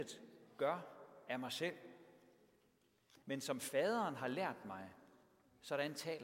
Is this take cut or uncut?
cut